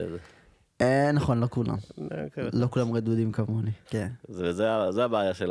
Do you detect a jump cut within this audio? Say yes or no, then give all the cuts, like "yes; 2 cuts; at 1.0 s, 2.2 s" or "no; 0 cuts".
yes; 1 cut; at 3.9 s